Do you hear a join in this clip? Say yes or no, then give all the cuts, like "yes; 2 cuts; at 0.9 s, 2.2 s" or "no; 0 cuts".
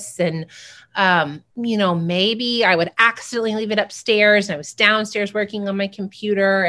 yes; 1 cut; at 1.5 s